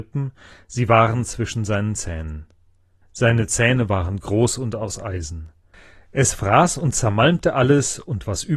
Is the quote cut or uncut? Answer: cut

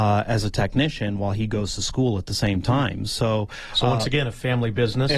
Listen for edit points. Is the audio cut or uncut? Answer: uncut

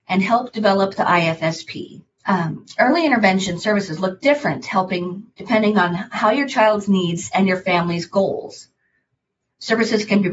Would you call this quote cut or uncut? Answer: cut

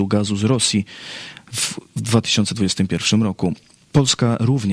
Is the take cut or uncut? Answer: uncut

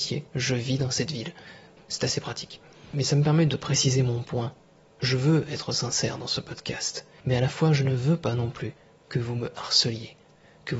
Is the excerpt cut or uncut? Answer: uncut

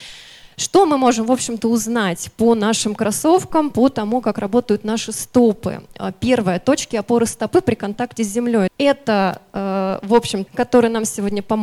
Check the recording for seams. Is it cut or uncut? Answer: cut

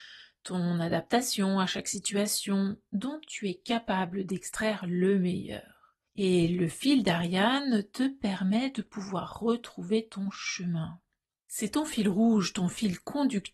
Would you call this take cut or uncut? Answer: uncut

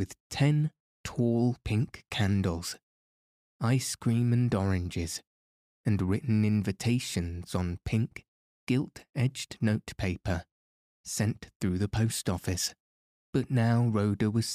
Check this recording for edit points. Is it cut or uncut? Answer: cut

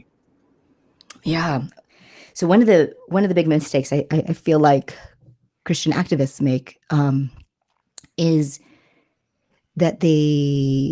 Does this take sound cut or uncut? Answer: uncut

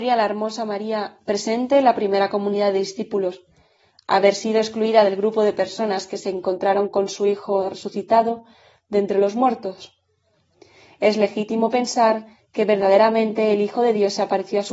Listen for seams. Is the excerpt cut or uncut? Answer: uncut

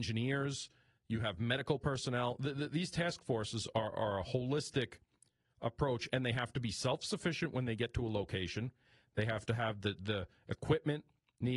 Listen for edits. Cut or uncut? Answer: uncut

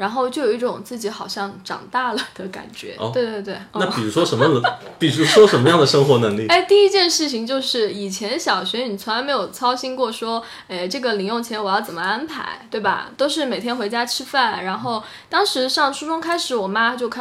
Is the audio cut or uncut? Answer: uncut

